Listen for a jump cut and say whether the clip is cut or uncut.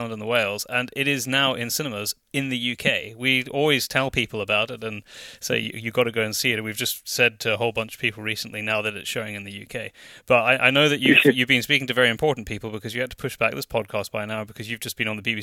uncut